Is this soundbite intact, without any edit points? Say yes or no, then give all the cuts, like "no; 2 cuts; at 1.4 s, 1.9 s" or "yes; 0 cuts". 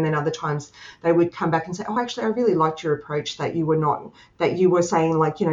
yes; 0 cuts